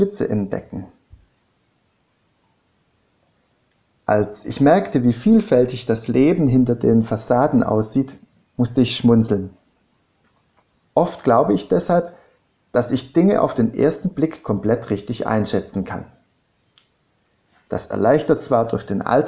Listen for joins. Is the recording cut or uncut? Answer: cut